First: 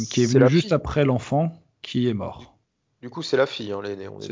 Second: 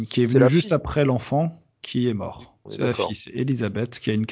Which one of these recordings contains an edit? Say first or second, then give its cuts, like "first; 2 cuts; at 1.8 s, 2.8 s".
second; 1 cut; at 2.7 s